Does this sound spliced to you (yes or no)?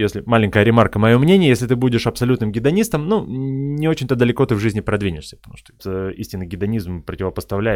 yes